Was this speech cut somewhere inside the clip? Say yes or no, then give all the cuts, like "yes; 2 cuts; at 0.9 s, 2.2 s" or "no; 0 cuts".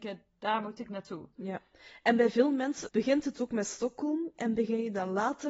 yes; 1 cut; at 2.9 s